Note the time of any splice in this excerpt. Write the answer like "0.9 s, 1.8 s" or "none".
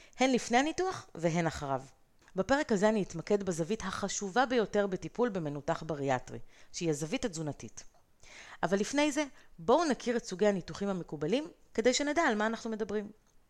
none